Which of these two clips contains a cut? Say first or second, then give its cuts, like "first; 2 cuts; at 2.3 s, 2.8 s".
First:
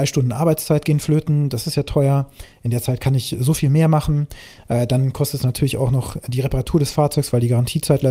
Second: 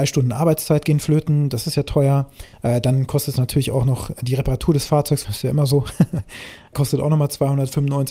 second; 3 cuts; at 2.5 s, 5.2 s, 6.7 s